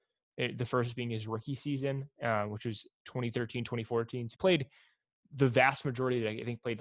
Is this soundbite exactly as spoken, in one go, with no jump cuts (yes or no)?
no